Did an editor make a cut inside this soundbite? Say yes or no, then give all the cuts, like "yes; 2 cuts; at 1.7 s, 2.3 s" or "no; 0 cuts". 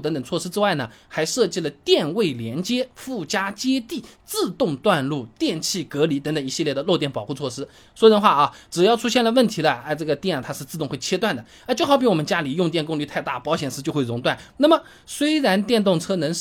yes; 1 cut; at 14.5 s